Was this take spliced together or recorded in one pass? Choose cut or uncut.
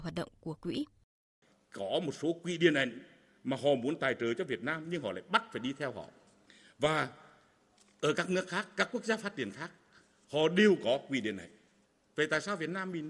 uncut